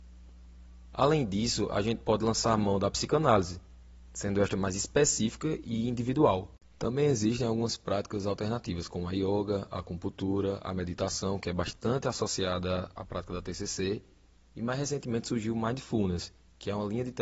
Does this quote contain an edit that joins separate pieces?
no; 0 cuts

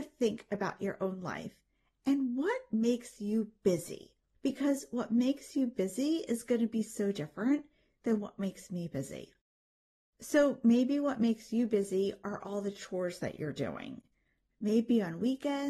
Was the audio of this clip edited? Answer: yes; 1 cut; at 4.3 s

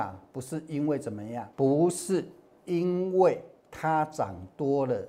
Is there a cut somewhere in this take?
yes; 1 cut; at 1.5 s

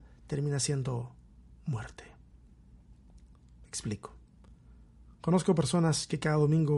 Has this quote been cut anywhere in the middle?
no; 0 cuts

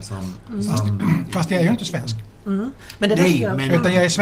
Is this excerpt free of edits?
yes; 0 cuts

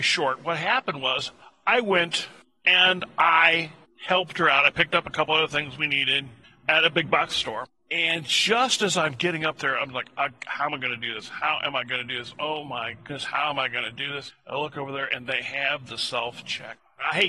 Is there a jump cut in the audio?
no; 0 cuts

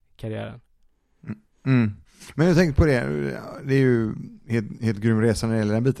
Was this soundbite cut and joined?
no; 0 cuts

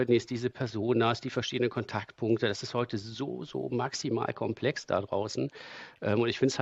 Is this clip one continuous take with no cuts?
yes; 0 cuts

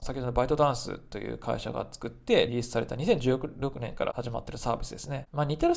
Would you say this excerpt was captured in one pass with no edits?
no; 1 cut; at 2.5 s

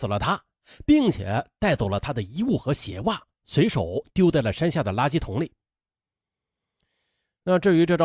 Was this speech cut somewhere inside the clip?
no; 0 cuts

